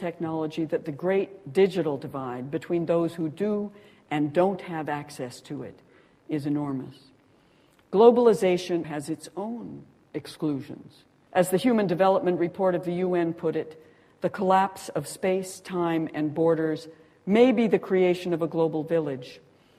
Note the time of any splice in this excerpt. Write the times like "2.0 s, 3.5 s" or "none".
8.8 s, 11.3 s